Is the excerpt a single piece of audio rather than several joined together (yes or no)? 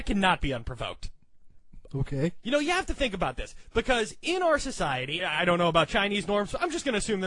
no